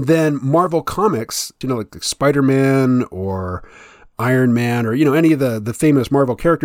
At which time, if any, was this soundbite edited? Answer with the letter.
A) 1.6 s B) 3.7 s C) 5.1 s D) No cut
A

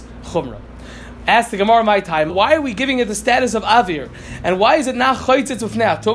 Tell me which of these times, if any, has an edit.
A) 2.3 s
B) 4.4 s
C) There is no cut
A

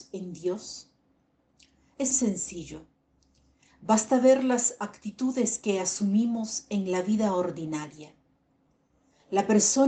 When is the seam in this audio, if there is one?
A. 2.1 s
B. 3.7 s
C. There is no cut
A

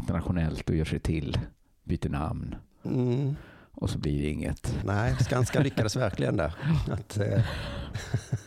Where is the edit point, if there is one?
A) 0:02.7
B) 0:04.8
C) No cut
B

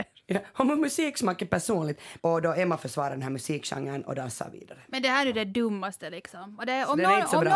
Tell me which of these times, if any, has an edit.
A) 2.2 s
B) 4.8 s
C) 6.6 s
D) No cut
A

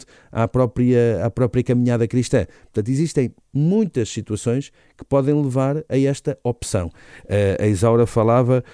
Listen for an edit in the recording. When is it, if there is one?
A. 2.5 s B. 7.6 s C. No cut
C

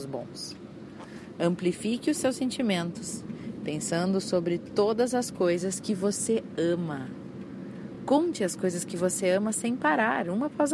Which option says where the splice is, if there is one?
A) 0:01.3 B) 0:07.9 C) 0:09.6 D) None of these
D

